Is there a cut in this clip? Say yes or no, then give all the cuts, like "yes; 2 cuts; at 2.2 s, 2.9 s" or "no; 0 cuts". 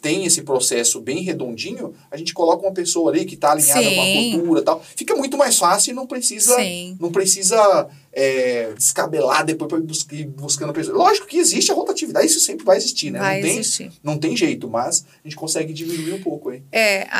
yes; 1 cut; at 8.8 s